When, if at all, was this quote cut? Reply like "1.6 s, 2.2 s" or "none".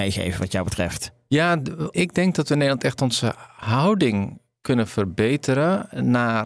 1.9 s